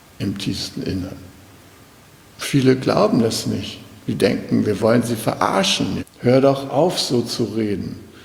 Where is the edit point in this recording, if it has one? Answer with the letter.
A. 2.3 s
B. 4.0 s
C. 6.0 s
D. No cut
C